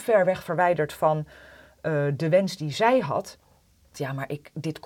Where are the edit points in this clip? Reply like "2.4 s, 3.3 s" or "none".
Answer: 3.9 s